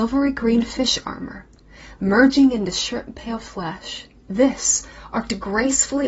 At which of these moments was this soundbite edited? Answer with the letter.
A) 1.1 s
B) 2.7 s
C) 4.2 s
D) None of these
C